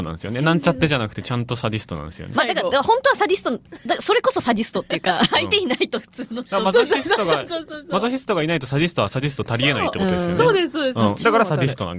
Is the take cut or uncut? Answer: cut